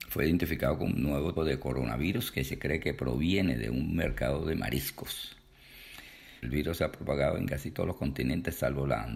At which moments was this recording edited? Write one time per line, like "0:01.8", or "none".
0:01.4
0:06.4